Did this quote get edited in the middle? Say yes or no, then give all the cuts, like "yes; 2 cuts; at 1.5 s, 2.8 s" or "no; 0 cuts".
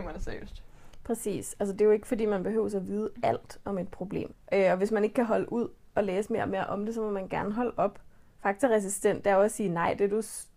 yes; 2 cuts; at 4.3 s, 8.4 s